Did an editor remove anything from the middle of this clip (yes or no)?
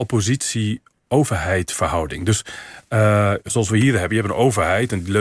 no